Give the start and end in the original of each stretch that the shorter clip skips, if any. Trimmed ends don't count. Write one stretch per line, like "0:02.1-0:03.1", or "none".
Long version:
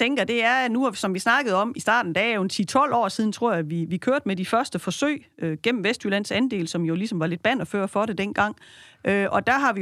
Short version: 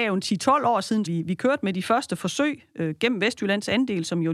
0:03.3-0:03.7